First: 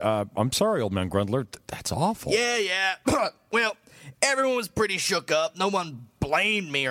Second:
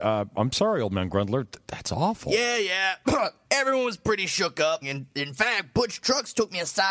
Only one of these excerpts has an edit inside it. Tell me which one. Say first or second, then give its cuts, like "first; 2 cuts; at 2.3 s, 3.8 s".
second; 2 cuts; at 3.4 s, 4.8 s